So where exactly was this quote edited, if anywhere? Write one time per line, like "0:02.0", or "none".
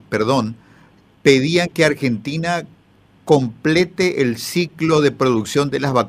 none